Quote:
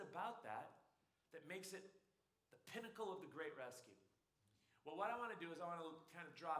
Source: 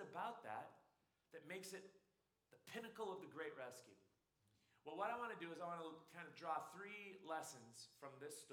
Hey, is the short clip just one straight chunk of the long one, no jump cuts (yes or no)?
yes